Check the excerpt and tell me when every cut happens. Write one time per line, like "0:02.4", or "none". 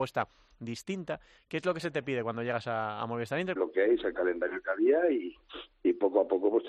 0:03.6